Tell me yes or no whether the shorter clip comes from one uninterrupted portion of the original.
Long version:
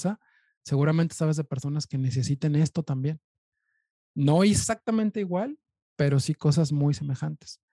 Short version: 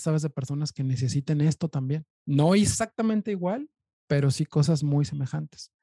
no